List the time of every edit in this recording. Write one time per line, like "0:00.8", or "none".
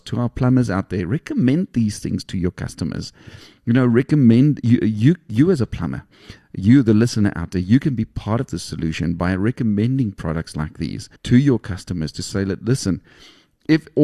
0:11.2